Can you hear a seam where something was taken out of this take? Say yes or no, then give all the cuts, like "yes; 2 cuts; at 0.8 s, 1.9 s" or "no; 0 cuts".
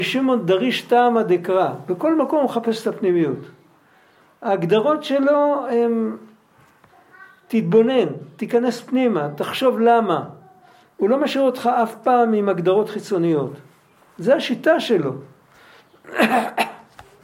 no; 0 cuts